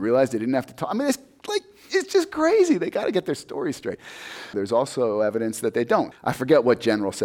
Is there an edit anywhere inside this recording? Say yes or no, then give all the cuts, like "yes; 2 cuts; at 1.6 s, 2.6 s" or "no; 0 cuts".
yes; 2 cuts; at 4.5 s, 6.1 s